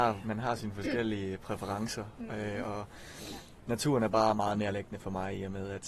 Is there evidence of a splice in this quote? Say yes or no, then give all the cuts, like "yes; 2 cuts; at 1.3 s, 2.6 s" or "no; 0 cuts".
no; 0 cuts